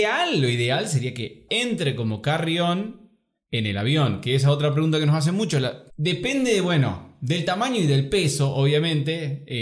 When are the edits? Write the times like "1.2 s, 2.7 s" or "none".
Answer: 1.5 s, 5.9 s